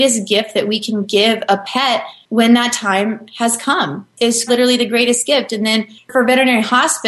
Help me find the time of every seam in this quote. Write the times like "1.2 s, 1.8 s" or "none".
4.5 s